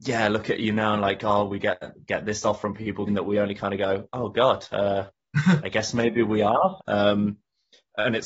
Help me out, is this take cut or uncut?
cut